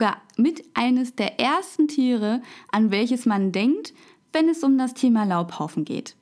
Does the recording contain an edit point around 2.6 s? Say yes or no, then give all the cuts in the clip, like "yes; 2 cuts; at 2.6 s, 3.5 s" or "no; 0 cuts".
no; 0 cuts